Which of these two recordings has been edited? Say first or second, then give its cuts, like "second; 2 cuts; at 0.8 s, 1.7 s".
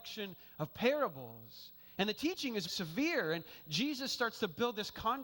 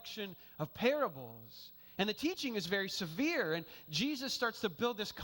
first; 1 cut; at 2.7 s